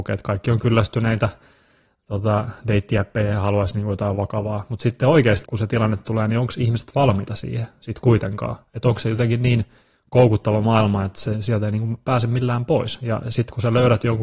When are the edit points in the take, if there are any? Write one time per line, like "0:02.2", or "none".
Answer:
0:05.4

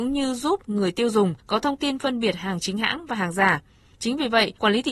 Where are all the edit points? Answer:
0:03.9

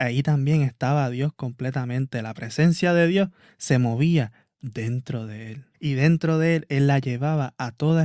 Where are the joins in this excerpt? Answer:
0:05.7

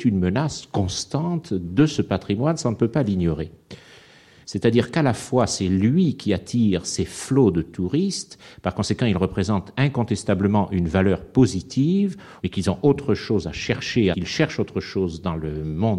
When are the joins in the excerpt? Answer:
0:04.4
0:12.4
0:14.1

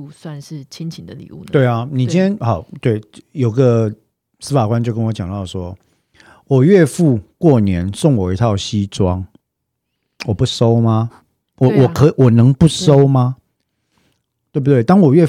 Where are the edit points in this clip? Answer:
none

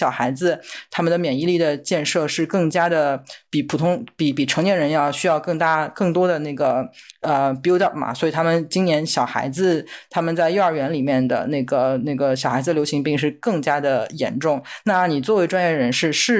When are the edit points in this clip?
0:14.8

